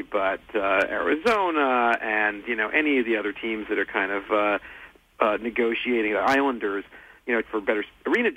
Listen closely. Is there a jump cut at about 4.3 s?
no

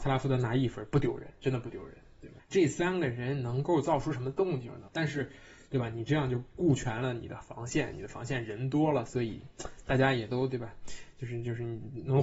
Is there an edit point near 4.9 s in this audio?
yes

